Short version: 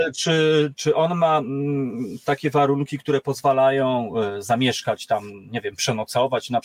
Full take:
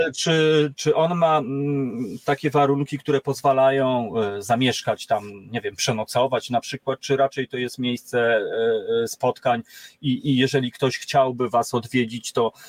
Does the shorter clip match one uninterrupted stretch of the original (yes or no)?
yes